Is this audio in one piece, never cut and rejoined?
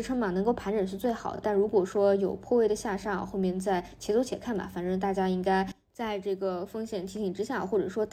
yes; 0 cuts

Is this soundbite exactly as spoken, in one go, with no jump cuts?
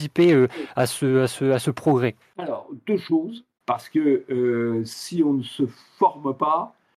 no; 1 cut; at 3.6 s

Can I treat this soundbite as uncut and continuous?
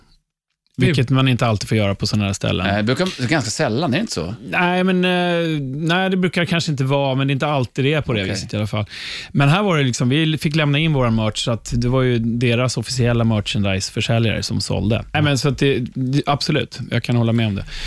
no; 1 cut; at 15.1 s

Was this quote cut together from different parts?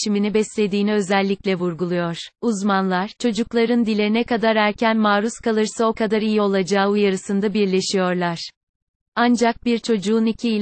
yes; 1 cut; at 2.3 s

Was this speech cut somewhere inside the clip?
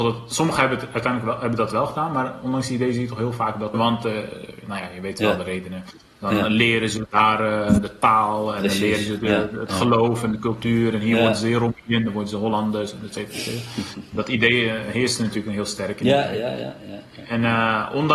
yes; 1 cut; at 3.7 s

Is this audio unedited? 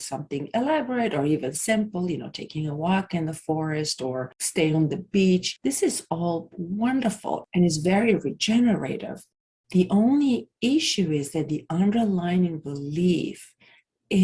yes; 0 cuts

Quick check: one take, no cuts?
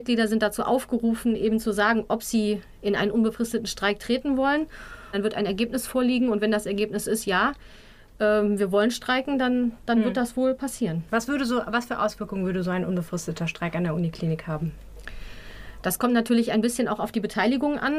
no; 1 cut; at 5.1 s

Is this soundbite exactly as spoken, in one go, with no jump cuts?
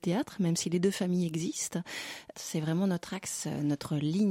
no; 1 cut; at 2.3 s

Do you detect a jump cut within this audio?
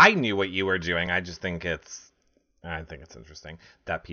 no; 0 cuts

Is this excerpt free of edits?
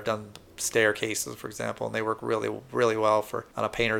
yes; 0 cuts

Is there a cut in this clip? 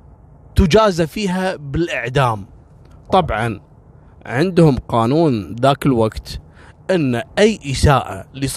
no; 0 cuts

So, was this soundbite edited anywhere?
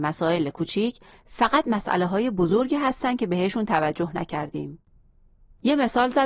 no; 0 cuts

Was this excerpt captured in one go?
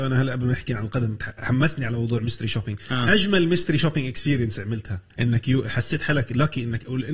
no; 1 cut; at 5.1 s

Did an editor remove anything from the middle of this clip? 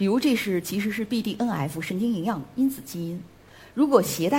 no; 0 cuts

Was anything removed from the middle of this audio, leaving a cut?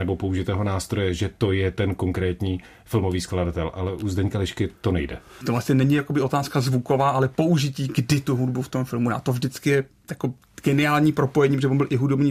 yes; 1 cut; at 5.4 s

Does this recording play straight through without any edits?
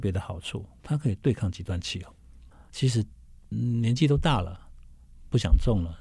no; 1 cut; at 2.5 s

